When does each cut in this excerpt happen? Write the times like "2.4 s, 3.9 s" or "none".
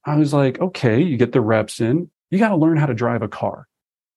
2.1 s

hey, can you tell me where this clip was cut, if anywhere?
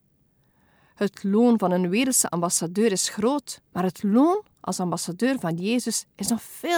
3.7 s

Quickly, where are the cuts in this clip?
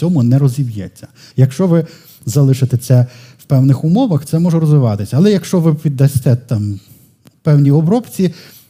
1.3 s

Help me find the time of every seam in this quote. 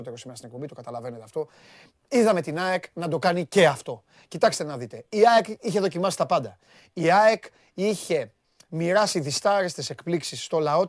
none

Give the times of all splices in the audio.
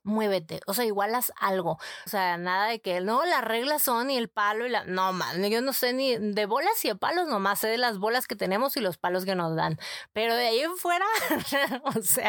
2.1 s

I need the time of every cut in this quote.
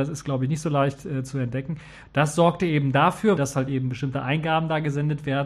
2.0 s, 3.4 s

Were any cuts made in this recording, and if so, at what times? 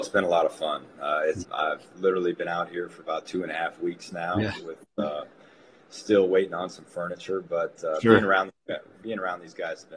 1.4 s

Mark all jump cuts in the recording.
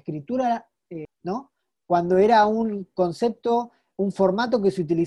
1.0 s

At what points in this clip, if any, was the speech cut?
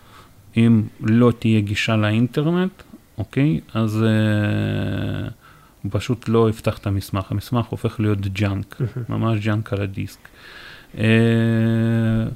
none

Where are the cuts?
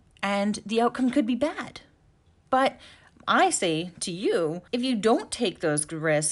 4.7 s

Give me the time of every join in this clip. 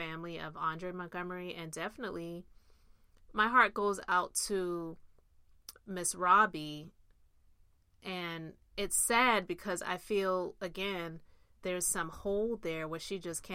11.6 s

